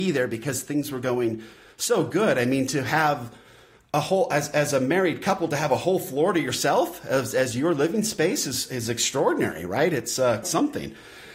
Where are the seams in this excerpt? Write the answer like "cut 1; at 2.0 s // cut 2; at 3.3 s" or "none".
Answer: cut 1; at 10.4 s